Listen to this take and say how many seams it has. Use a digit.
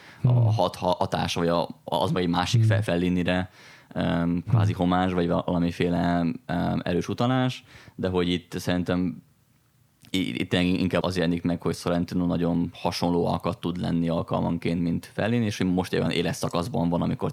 1